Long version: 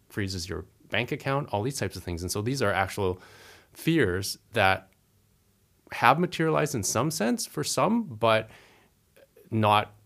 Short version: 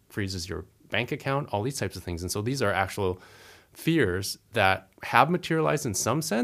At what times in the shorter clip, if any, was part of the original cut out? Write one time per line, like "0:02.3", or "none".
0:04.9